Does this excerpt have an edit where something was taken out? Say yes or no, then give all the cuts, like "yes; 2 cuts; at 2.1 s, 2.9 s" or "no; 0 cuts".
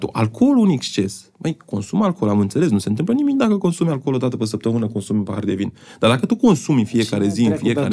no; 0 cuts